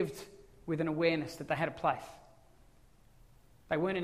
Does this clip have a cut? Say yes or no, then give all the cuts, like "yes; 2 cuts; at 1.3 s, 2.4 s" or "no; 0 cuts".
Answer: no; 0 cuts